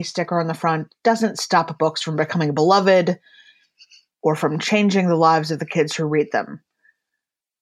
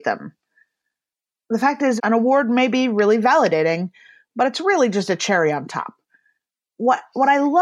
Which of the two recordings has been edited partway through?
second; 1 cut; at 2.0 s

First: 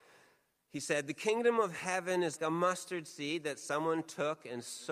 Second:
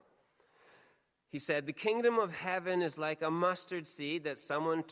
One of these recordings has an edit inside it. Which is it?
first; 1 cut; at 2.4 s

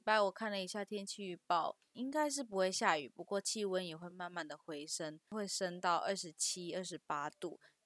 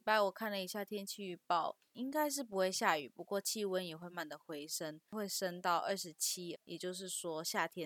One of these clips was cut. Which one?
second; 2 cuts; at 4.1 s, 6.5 s

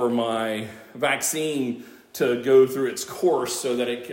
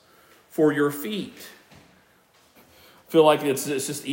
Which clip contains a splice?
second; 1 cut; at 2.5 s

